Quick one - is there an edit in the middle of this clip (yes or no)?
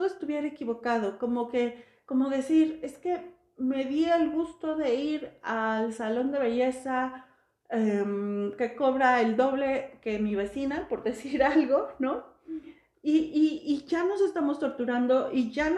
no